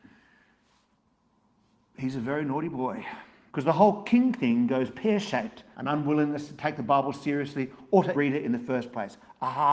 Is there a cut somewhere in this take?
yes; 3 cuts; at 3.5 s, 5.7 s, 8.1 s

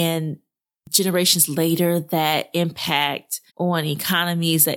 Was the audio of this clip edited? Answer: yes; 1 cut; at 3.5 s

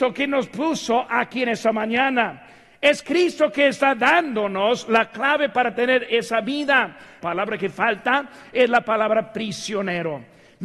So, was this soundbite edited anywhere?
yes; 1 cut; at 7.2 s

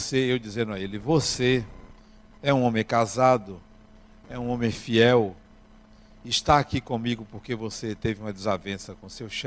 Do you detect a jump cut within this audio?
yes; 1 cut; at 2.3 s

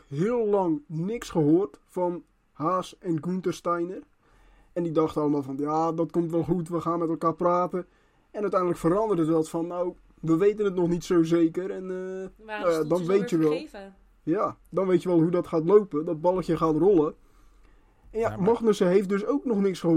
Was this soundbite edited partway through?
no; 0 cuts

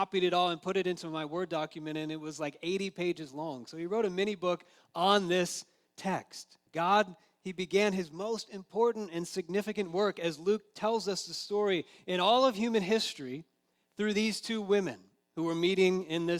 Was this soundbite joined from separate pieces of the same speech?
yes; 1 cut; at 6.7 s

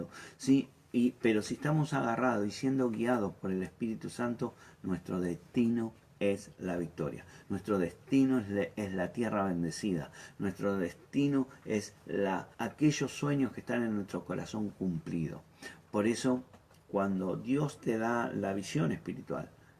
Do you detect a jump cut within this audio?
yes; 2 cuts; at 7.4 s, 12.5 s

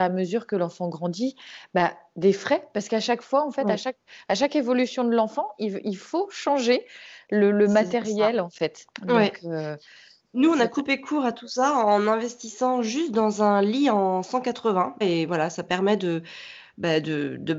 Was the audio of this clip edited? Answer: yes; 2 cuts; at 8.9 s, 15.0 s

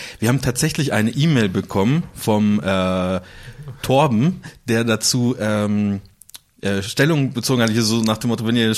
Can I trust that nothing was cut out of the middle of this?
yes; 0 cuts

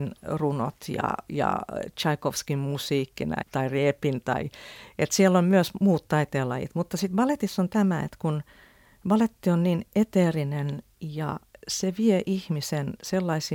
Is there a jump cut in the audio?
yes; 1 cut; at 3.4 s

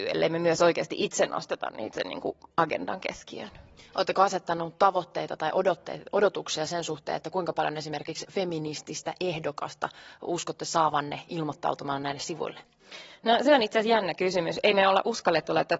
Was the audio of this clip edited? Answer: no; 0 cuts

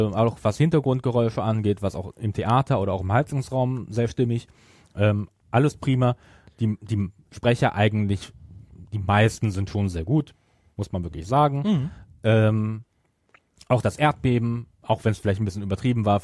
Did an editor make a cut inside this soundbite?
no; 0 cuts

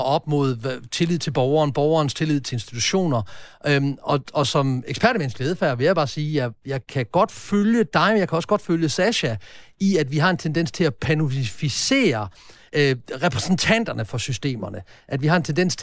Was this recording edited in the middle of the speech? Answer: no; 0 cuts

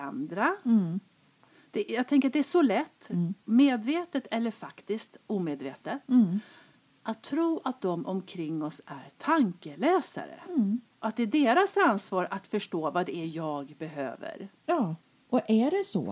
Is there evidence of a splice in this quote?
no; 0 cuts

